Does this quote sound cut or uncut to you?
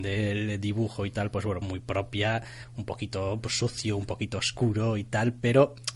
cut